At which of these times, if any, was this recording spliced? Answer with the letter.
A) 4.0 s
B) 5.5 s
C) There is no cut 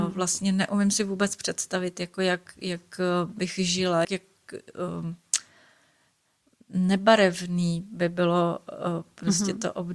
A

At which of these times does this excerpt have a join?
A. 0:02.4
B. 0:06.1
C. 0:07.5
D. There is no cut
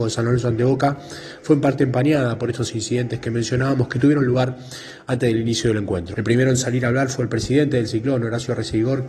B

